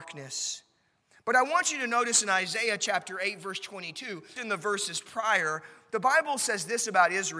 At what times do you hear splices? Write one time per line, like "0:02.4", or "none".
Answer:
0:04.4